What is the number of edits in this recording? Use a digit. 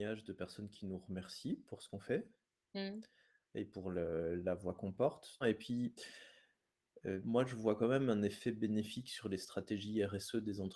2